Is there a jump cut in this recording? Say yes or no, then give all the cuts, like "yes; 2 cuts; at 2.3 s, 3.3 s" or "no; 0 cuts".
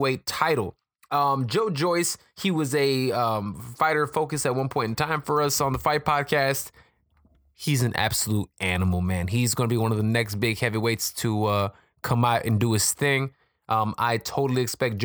no; 0 cuts